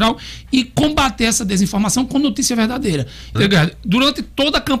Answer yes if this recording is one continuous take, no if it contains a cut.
no